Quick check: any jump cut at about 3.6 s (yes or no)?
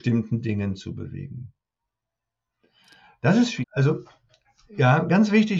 yes